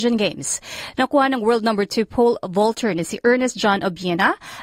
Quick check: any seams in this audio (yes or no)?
no